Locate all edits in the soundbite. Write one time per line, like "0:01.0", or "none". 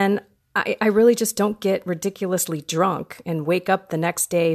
none